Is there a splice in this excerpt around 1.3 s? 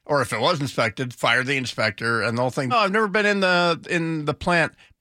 no; 1 cut; at 2.7 s

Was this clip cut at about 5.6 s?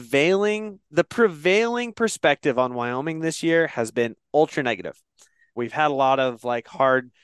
yes; 1 cut; at 5.6 s

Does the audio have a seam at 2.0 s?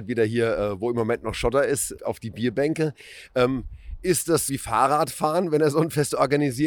yes; 2 cuts; at 2.0 s, 4.5 s

